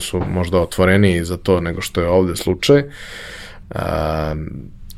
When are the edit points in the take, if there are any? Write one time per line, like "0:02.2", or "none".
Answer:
0:03.6